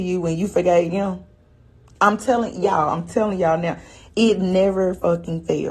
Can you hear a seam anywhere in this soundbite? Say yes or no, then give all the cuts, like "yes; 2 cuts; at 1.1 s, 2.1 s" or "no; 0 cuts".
no; 0 cuts